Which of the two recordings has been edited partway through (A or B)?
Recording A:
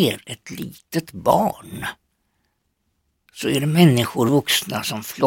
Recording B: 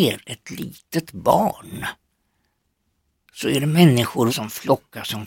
B